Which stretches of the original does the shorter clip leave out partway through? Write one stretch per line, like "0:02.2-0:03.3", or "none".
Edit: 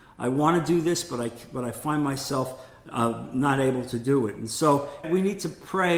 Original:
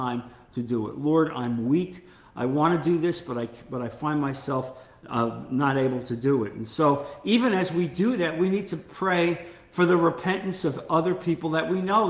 0:07.2-0:08.3

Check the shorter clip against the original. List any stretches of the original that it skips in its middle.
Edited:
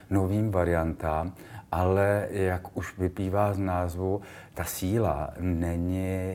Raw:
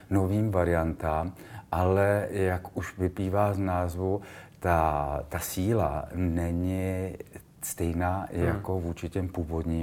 0:04.5-0:05.3

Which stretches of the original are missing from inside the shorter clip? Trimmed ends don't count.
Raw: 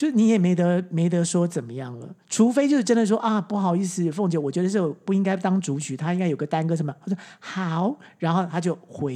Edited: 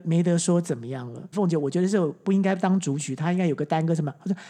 0:02.2-0:04.1

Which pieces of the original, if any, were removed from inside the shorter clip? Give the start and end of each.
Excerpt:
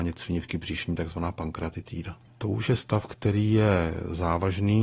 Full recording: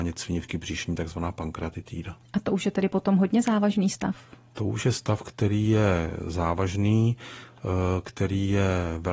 0:02.3-0:04.4

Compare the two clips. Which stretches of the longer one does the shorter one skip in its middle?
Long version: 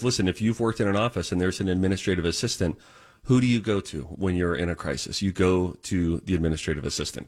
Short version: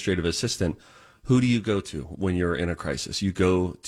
none

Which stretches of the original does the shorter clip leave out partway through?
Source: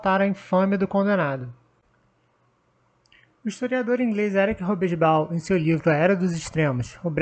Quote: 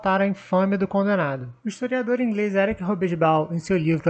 0:01.6-0:03.4

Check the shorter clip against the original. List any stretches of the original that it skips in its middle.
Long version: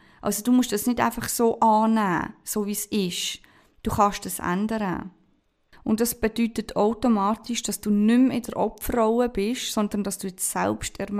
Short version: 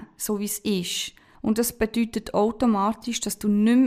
0:03.6-0:05.8

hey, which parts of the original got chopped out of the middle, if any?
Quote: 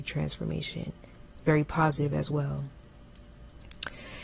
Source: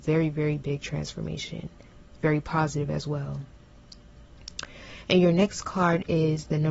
none

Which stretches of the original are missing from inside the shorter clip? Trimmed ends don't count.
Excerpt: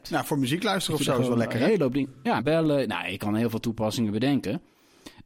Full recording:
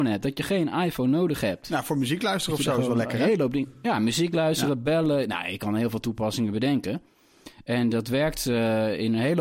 0:04.0-0:04.8

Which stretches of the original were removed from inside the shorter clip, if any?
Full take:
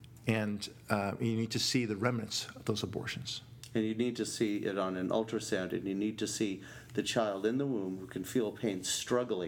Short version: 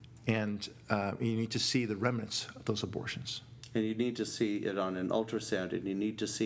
none

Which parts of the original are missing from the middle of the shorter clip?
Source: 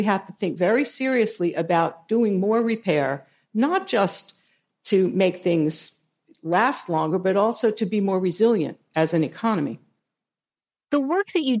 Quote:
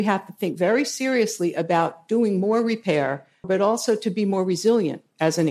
0:03.4-0:07.2

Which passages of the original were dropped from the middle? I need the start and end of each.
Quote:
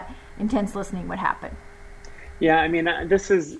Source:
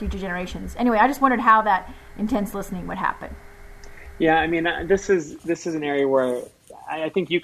none

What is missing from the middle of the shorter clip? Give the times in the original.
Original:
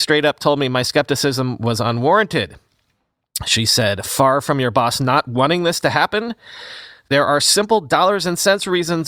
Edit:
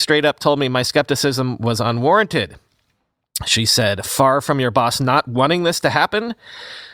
none

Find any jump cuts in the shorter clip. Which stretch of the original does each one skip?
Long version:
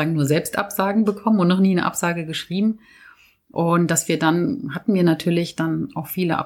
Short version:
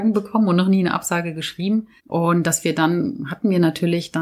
0:02.9-0:03.4

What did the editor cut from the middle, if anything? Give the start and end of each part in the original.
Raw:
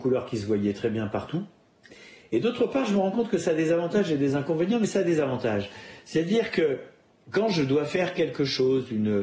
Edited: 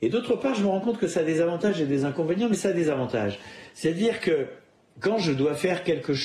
none

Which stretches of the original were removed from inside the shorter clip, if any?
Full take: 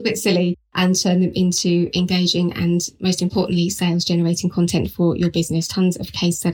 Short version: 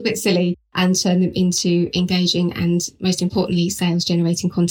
none

